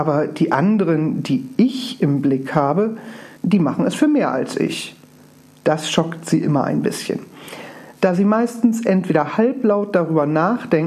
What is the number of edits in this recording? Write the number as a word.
one